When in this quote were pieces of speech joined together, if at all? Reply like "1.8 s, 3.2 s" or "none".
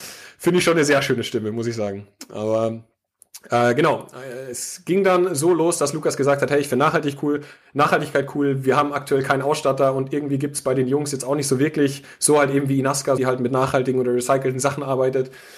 13.2 s